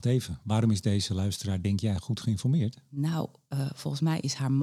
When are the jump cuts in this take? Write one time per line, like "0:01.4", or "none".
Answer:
none